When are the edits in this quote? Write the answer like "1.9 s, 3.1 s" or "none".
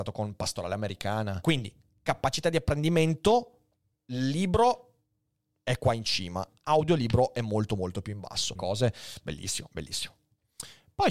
1.4 s, 8.5 s